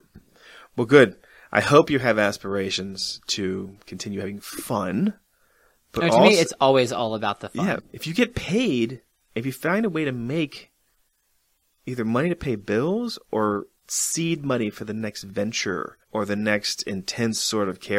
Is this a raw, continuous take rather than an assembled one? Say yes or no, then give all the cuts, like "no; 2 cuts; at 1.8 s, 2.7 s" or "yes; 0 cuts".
no; 3 cuts; at 7.8 s, 13.8 s, 16.0 s